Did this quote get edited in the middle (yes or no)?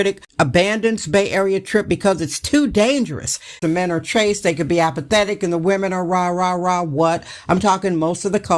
yes